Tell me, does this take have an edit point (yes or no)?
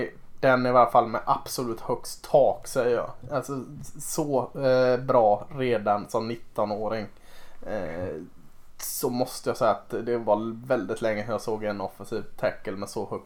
no